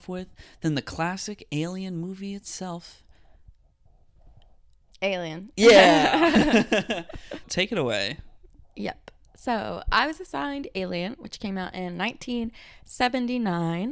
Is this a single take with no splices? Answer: no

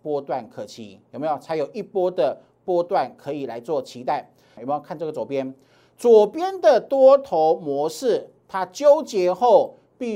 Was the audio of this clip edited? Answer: yes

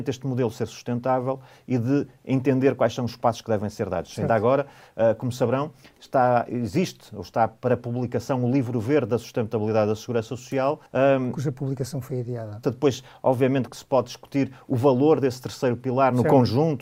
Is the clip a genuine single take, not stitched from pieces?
no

